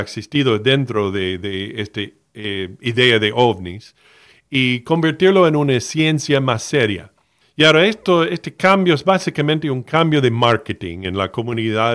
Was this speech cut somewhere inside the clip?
yes; 1 cut; at 7.4 s

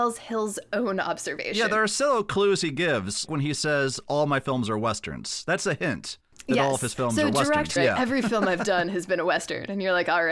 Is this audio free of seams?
no; 2 cuts; at 3.3 s, 7.8 s

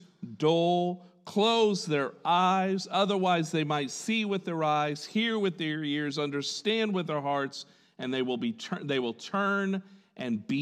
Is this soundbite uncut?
yes; 0 cuts

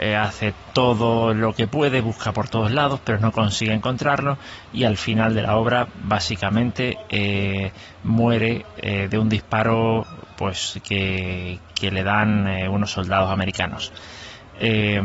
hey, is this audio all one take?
yes; 0 cuts

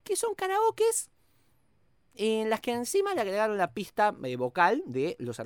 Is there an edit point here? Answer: no; 0 cuts

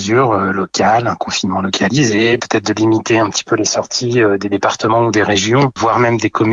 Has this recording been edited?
no; 0 cuts

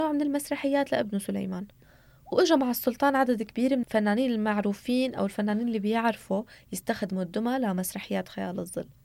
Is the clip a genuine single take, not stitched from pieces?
no; 1 cut; at 3.8 s

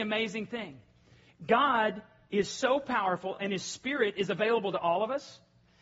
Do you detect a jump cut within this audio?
no; 0 cuts

